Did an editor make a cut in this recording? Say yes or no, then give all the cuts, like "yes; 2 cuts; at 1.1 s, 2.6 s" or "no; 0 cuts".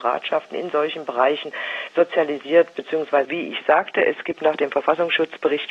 yes; 1 cut; at 3.2 s